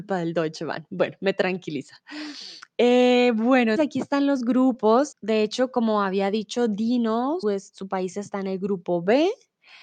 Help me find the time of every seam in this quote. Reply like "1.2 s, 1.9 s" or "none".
3.8 s, 5.1 s, 7.4 s